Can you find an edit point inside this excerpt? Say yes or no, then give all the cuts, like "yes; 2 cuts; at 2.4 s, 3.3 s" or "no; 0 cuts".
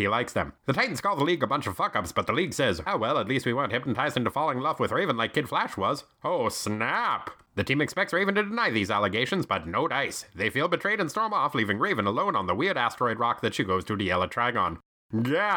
yes; 1 cut; at 2.9 s